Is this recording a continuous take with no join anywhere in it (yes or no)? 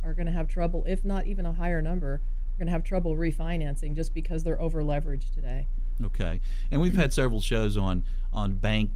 yes